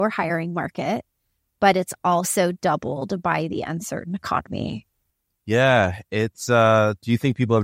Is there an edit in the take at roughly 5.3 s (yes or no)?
no